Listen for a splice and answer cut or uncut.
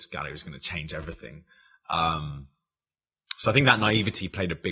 uncut